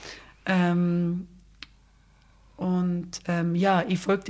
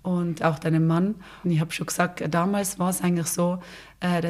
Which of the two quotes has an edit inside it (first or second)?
second